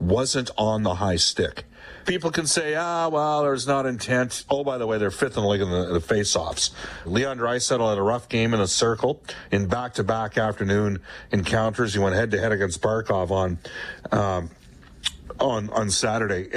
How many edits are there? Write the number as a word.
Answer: three